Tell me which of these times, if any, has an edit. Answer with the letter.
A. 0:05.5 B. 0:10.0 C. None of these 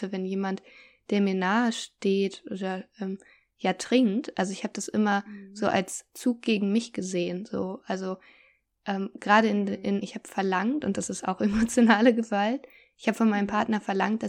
B